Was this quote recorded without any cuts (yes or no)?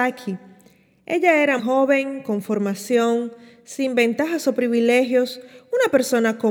no